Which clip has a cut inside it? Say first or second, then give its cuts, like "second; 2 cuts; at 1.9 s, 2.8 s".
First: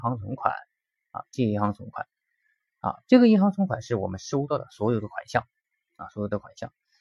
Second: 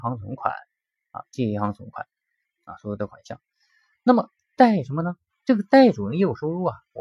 second; 2 cuts; at 2.4 s, 5.3 s